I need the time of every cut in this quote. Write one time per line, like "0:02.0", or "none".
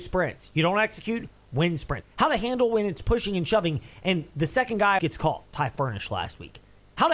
0:02.0
0:05.0